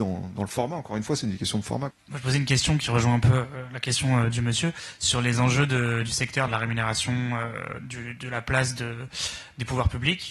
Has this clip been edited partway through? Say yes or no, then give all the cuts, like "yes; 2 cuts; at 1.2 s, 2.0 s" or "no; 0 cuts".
yes; 2 cuts; at 1.9 s, 6.5 s